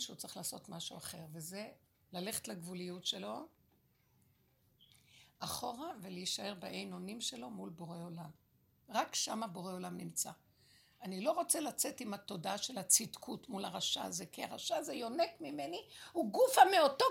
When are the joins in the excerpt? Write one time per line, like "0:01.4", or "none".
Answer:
none

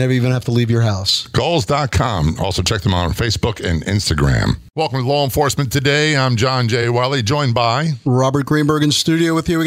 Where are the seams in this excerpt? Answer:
none

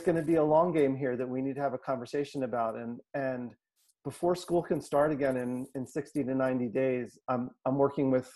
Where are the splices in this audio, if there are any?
0:07.2

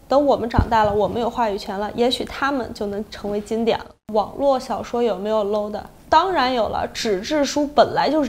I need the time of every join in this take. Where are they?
none

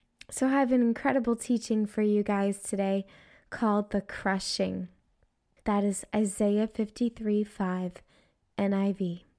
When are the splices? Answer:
0:05.6

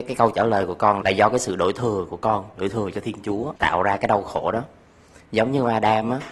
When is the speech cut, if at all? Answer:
0:01.0
0:03.6

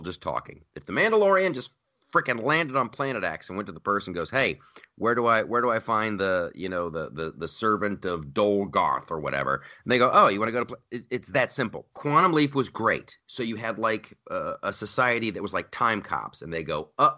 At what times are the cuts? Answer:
0:11.9

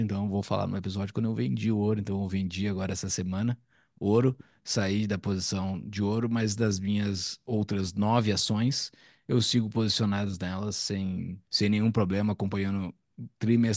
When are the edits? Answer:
0:11.4

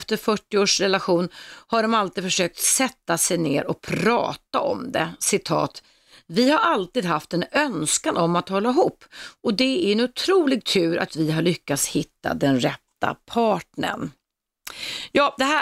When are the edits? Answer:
0:11.1

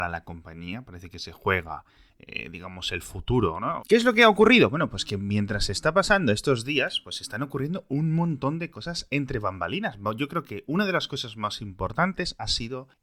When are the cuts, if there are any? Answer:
0:03.8

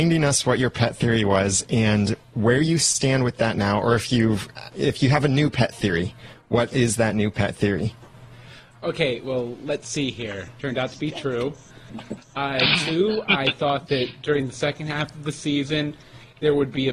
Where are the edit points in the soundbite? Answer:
0:10.6

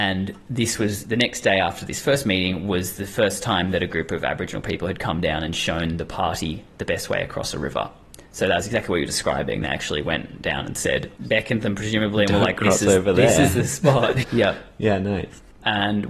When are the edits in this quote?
0:11.2
0:14.2

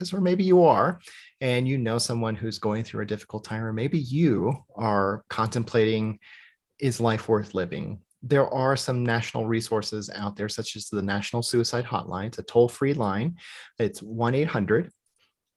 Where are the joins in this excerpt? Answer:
0:05.3

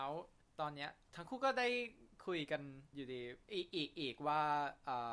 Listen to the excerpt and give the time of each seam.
0:03.5

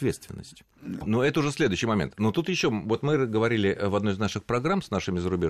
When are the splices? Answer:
0:01.0

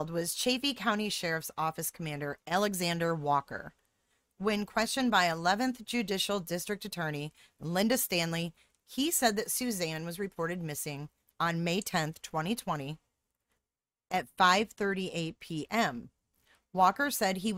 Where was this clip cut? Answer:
none

